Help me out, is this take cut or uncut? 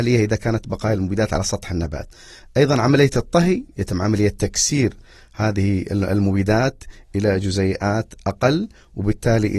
uncut